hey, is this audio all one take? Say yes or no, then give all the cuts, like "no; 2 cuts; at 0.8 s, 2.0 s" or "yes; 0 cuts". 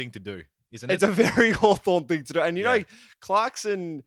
yes; 0 cuts